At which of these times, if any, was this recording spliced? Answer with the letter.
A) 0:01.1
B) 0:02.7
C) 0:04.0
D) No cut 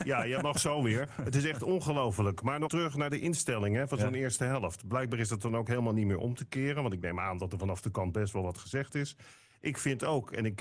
B